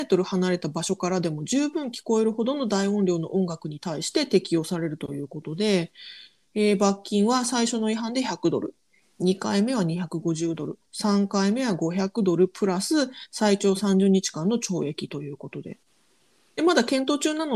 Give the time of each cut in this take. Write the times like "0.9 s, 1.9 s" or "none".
16.6 s